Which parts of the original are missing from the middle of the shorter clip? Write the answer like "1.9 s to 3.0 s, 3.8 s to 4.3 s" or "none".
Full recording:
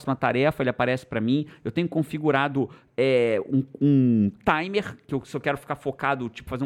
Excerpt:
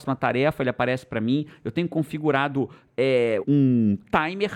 3.4 s to 3.8 s